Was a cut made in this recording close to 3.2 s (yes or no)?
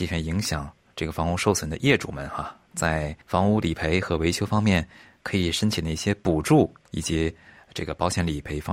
yes